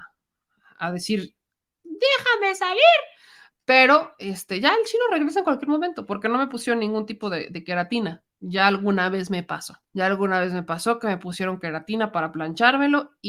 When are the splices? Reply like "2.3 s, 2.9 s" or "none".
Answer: 9.8 s

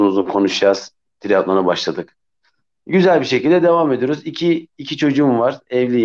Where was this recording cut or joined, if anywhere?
none

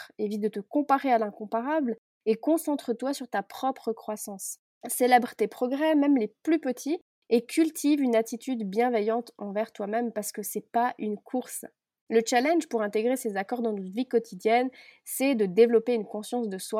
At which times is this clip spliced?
none

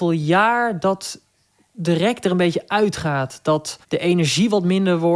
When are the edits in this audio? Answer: 3.8 s

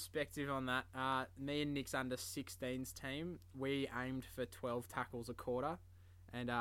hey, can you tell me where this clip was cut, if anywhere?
none

